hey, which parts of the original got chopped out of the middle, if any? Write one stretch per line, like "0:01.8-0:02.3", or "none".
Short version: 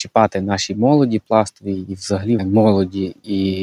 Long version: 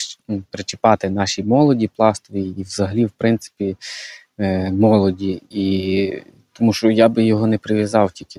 0:03.1-0:04.7

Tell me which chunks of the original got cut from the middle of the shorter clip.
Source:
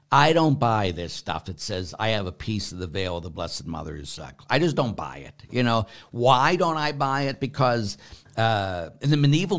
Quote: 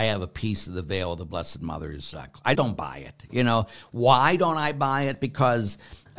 0:04.6-0:04.7

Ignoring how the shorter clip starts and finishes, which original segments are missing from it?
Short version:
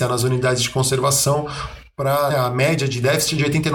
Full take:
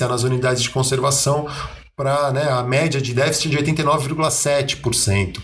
0:02.3-0:02.4

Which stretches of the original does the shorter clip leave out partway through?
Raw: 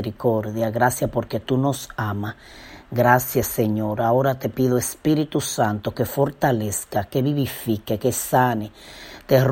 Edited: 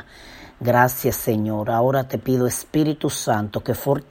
none

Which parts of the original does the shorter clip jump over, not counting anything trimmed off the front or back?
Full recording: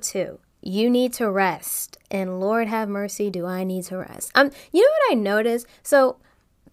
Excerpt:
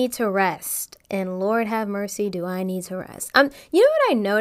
none

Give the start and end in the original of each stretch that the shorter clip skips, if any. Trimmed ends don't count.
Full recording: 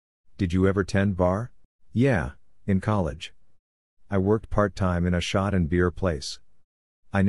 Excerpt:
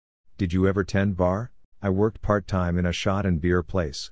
0:01.7-0:04.0

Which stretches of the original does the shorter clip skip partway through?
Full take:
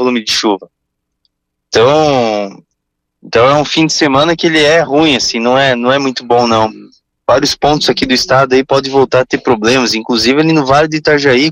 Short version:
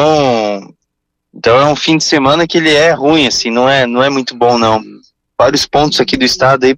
none

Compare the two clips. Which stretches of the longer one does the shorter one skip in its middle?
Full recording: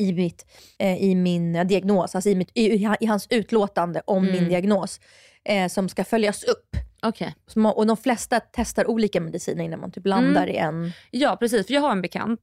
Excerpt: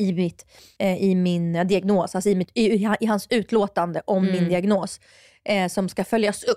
none

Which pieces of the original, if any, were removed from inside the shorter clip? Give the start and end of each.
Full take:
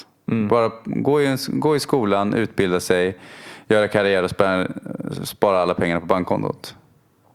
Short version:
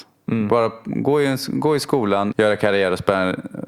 0:02.3-0:03.6

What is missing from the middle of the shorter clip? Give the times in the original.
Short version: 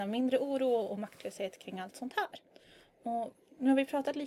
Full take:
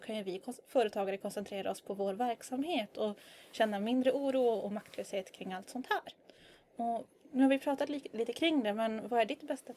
none

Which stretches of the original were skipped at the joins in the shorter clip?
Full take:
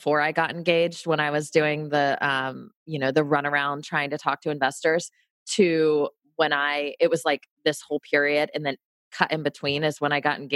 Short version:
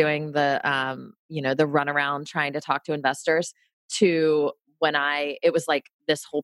none

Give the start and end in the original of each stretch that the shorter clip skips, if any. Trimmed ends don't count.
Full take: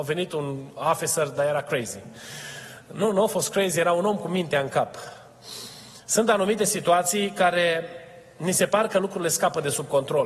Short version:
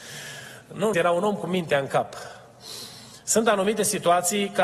0:03.1-0:03.7

